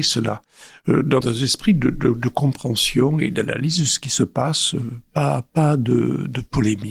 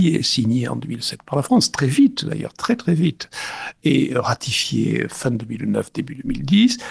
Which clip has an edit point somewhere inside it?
first; 1 cut; at 1.2 s

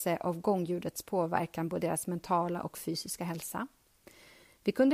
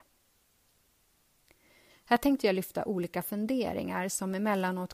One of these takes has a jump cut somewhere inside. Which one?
second; 1 cut; at 1.9 s

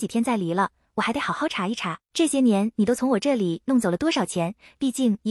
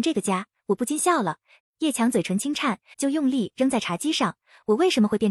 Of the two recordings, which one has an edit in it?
second; 2 cuts; at 1.6 s, 2.9 s

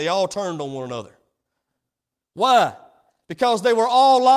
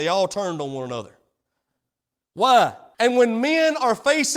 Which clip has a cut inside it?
second; 1 cut; at 2.9 s

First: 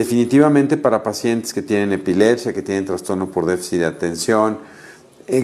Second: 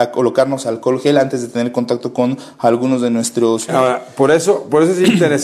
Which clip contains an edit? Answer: second; 1 cut; at 3.7 s

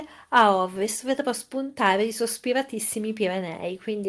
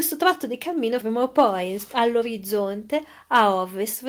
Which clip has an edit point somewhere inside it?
second; 1 cut; at 1.0 s

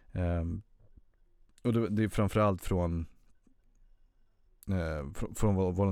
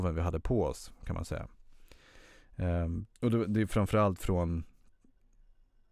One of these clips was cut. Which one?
second; 1 cut; at 3.1 s

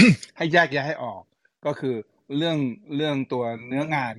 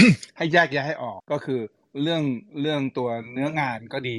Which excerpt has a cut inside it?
second; 1 cut; at 1.2 s

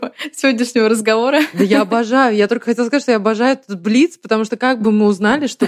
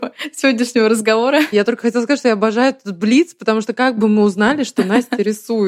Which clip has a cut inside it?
second; 1 cut; at 1.5 s

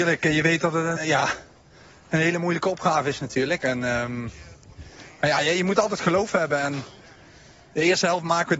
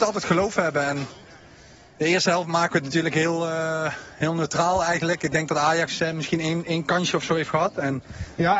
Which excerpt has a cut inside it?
first; 1 cut; at 1.0 s

